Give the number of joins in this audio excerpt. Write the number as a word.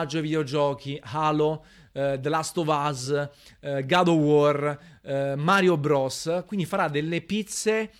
zero